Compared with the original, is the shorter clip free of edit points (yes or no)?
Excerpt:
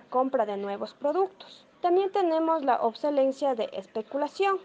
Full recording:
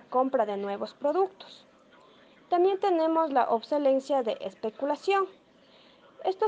no